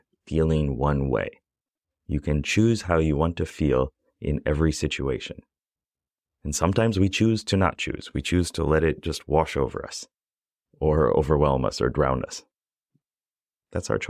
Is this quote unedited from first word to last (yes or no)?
yes